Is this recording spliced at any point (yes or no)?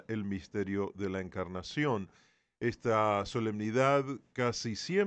no